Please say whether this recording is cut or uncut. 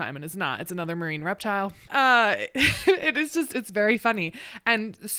cut